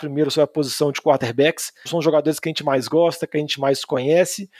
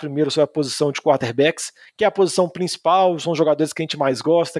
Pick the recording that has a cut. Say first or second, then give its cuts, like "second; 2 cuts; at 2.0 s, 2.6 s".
first; 1 cut; at 1.9 s